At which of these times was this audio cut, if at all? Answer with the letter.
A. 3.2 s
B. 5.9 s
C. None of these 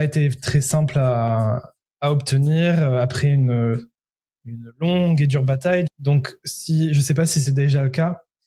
B